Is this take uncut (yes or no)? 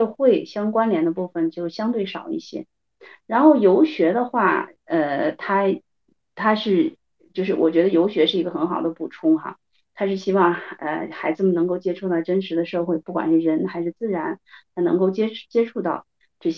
yes